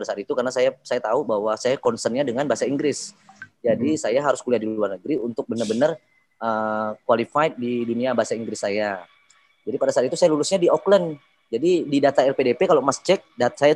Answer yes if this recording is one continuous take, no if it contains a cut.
yes